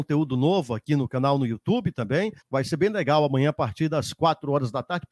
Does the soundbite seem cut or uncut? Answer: cut